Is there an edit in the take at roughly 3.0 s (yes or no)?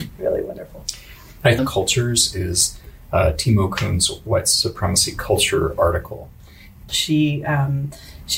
no